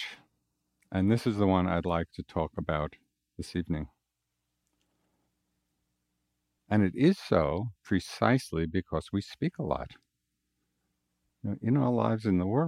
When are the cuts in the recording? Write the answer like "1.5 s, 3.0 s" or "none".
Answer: 6.6 s, 7.8 s